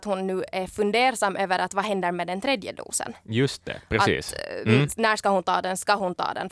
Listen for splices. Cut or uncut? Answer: uncut